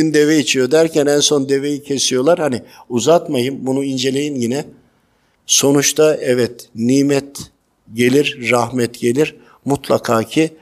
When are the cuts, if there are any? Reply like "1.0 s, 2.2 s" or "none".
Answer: none